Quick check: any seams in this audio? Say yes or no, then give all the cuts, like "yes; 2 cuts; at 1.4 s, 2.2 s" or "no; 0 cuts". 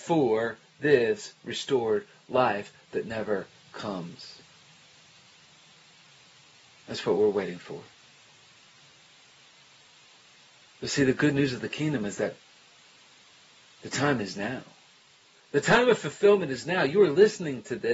no; 0 cuts